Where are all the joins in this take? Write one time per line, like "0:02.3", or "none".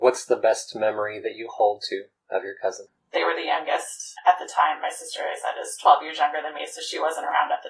0:03.0